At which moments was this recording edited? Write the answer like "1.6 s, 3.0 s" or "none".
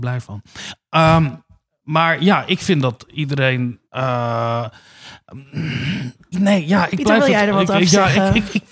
3.8 s, 6.3 s

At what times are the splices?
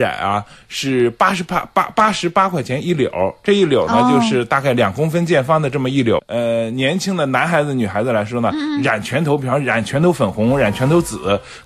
6.2 s

